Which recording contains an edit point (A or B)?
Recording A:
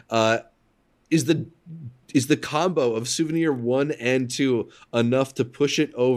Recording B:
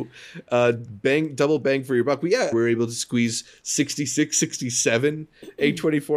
B